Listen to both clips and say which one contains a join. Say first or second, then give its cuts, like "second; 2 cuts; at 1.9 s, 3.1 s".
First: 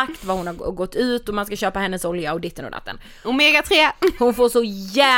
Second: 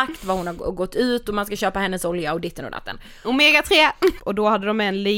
second; 1 cut; at 4.2 s